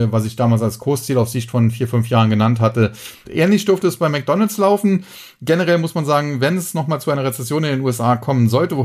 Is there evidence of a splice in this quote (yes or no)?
yes